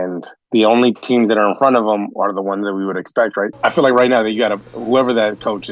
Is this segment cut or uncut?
cut